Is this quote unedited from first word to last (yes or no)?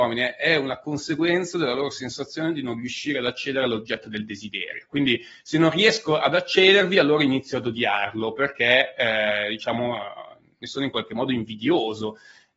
yes